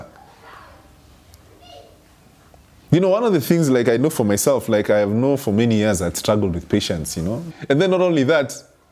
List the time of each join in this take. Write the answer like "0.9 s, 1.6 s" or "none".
7.5 s